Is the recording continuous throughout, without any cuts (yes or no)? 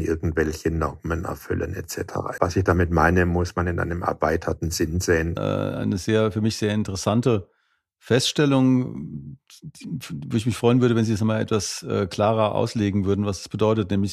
no